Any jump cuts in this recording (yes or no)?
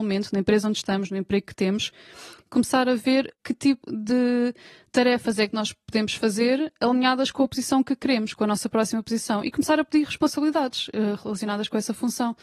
yes